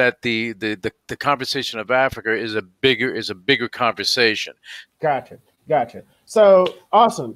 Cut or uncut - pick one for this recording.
cut